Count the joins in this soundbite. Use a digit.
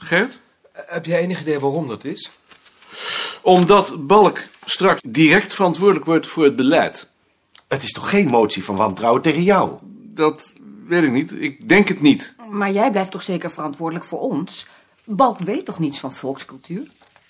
1